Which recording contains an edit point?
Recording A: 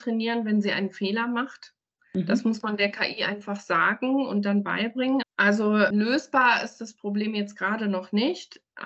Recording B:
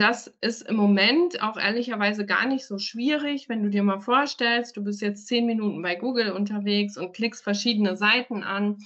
A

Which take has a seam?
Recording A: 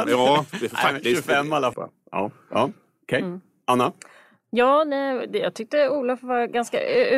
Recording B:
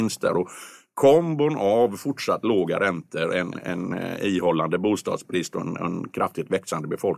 A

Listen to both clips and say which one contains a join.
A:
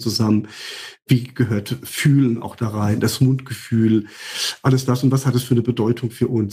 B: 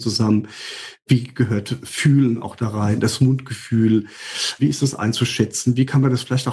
B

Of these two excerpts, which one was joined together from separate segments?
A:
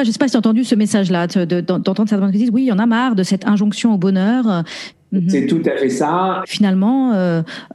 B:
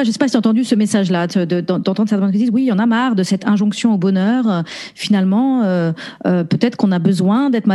A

